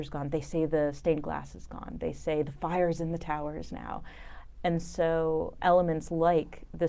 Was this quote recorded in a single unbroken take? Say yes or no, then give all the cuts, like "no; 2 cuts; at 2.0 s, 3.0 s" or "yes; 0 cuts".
no; 2 cuts; at 4.5 s, 5.6 s